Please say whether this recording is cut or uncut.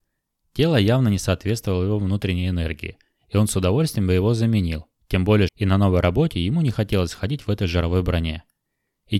cut